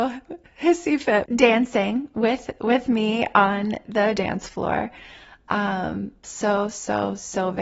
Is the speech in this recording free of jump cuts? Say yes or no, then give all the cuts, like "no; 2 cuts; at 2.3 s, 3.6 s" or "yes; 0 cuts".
no; 2 cuts; at 1.3 s, 6.2 s